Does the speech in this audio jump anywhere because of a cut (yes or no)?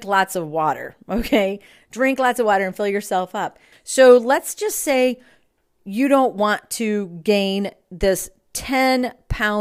yes